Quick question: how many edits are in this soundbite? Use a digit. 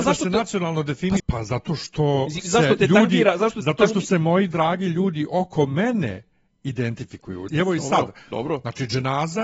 2